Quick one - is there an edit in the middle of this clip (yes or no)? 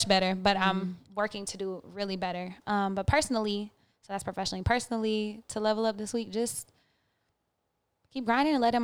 no